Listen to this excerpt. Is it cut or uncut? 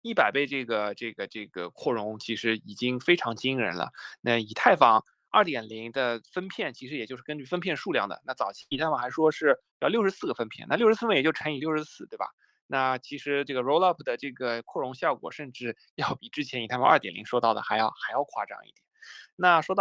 uncut